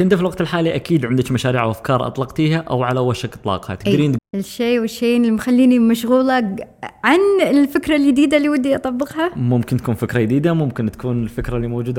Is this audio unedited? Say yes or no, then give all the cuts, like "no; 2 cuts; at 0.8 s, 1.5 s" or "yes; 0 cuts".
no; 1 cut; at 4.2 s